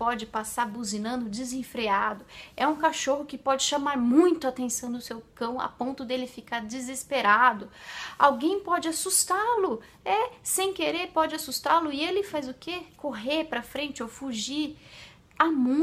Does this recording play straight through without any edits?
yes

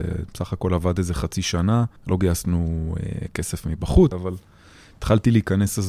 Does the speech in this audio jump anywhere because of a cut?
yes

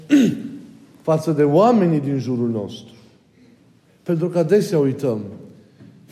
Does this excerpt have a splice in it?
yes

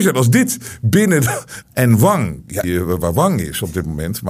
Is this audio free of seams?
no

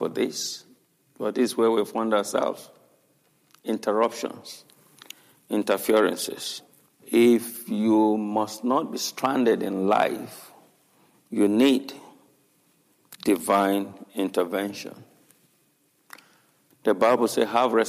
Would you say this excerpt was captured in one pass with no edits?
no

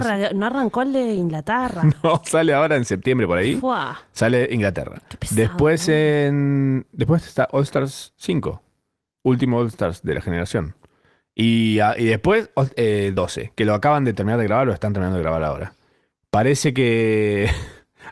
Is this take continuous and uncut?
yes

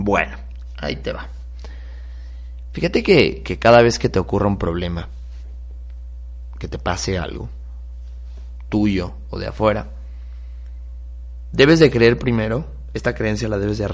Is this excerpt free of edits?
yes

